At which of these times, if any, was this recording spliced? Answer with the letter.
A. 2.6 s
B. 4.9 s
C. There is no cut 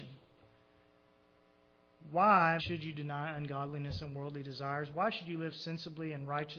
A